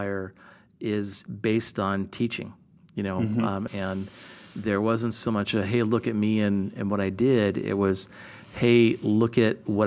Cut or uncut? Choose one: cut